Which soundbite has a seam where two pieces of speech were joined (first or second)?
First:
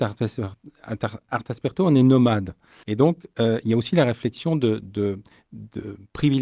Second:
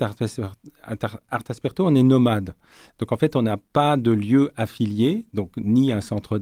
first